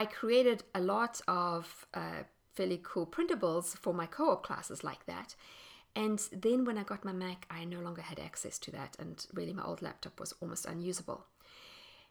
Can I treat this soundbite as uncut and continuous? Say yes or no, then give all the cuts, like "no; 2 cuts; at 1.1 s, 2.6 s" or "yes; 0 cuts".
yes; 0 cuts